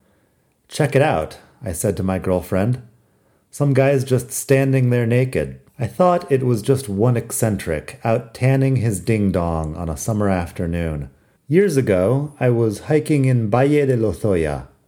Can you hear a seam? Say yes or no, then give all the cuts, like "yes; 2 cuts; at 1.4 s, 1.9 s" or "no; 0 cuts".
yes; 2 cuts; at 5.7 s, 11.4 s